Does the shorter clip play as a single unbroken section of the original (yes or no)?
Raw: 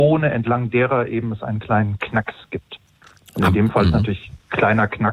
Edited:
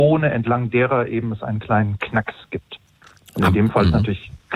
yes